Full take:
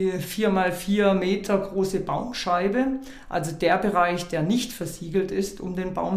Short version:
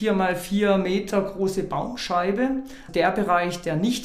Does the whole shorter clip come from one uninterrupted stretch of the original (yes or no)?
no